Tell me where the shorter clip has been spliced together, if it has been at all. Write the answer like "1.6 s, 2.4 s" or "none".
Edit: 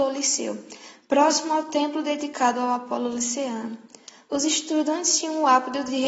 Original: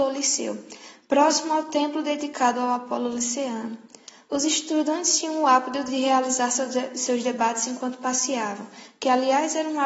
none